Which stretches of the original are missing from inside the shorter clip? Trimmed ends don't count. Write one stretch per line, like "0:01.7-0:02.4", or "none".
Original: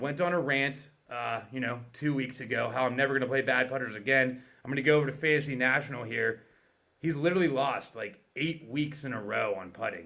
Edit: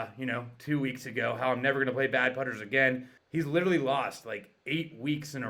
0:04.5-0:06.9